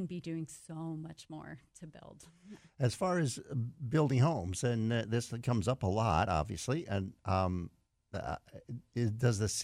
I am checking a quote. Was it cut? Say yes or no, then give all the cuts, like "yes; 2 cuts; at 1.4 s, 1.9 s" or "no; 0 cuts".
no; 0 cuts